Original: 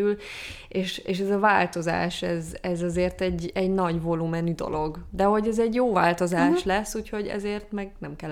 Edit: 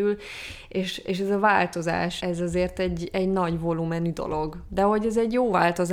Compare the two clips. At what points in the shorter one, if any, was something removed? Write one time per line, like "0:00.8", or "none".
0:02.2